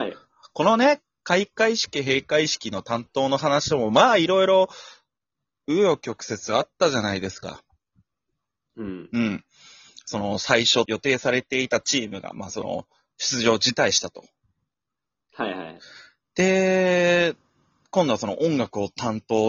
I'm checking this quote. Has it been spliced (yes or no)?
yes